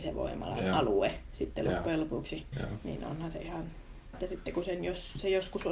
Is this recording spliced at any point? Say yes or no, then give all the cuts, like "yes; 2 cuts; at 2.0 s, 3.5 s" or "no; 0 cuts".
yes; 2 cuts; at 2.5 s, 4.1 s